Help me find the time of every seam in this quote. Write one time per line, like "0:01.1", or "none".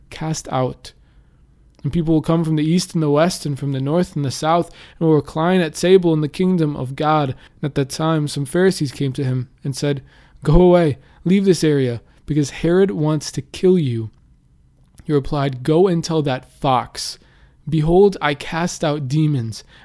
0:07.5